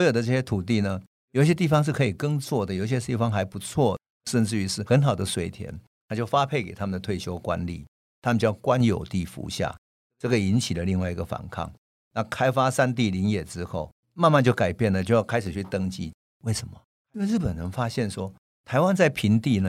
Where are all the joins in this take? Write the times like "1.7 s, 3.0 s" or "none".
11.9 s, 14.0 s, 16.2 s

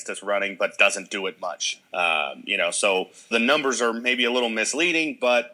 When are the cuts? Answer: 1.8 s, 3.3 s

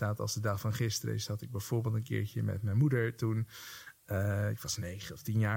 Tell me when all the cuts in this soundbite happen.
none

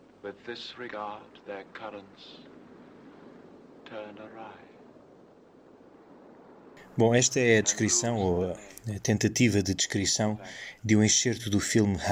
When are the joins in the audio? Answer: none

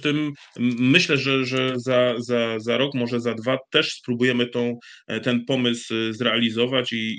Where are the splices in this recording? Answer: none

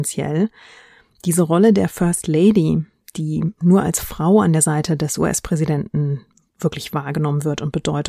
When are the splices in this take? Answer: none

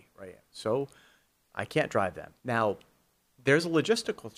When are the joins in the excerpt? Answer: 2.4 s

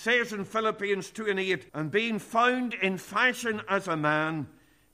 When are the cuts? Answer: 1.7 s

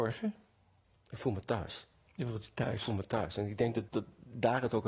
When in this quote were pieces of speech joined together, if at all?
3.9 s

